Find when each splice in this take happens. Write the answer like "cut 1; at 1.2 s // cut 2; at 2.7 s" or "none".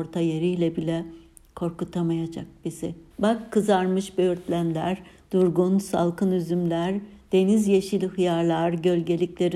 cut 1; at 3.1 s